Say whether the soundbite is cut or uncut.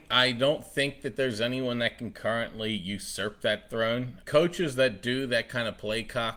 cut